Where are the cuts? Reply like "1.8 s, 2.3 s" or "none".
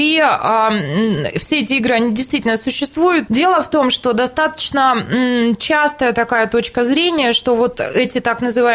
3.3 s